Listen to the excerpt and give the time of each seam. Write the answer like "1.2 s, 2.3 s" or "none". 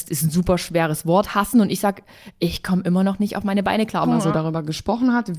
4.0 s